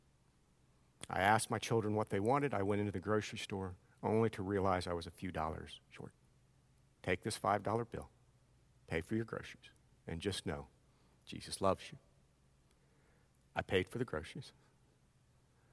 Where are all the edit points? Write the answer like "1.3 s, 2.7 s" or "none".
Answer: 7.0 s